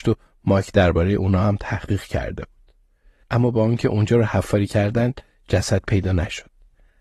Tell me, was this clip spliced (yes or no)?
yes